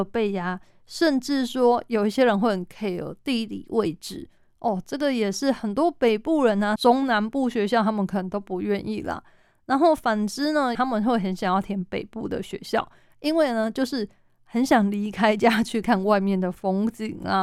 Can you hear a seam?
yes; 3 cuts; at 6.8 s, 10.7 s, 15.8 s

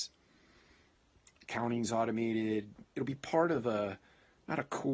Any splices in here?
yes; 1 cut; at 2.8 s

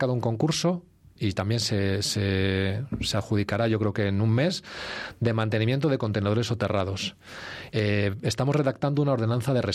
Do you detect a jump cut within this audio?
yes; 1 cut; at 7.7 s

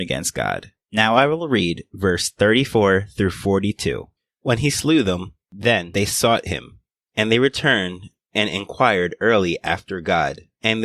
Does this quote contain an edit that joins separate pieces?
no; 0 cuts

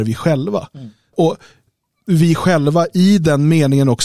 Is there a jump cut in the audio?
yes; 1 cut; at 1.1 s

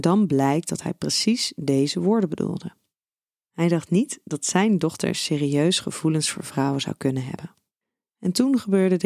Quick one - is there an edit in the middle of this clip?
no; 0 cuts

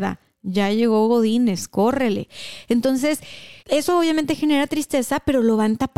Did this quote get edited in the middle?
yes; 1 cut; at 3.6 s

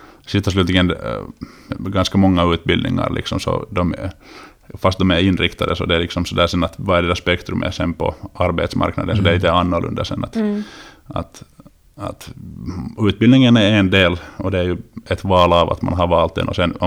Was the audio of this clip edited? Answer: no; 0 cuts

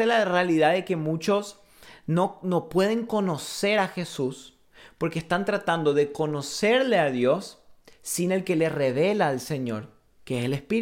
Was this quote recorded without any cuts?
yes; 0 cuts

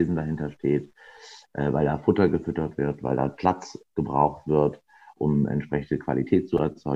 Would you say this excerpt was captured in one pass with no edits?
yes; 0 cuts

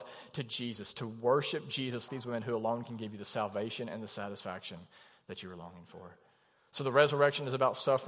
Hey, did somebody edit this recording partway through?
yes; 1 cut; at 2.1 s

